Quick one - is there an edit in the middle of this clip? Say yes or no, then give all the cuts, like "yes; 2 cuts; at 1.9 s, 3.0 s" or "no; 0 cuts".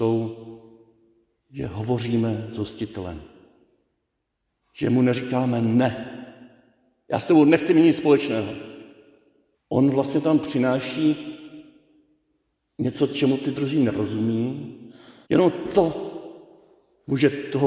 yes; 2 cuts; at 9.5 s, 15.2 s